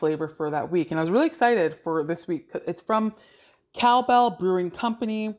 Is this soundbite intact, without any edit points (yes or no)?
yes